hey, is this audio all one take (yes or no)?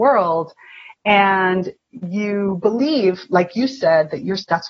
yes